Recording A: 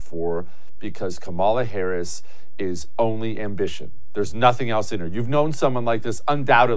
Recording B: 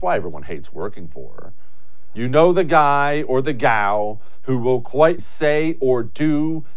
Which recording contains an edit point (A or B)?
B